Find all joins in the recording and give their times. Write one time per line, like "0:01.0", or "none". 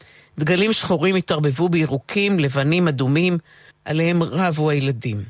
0:03.7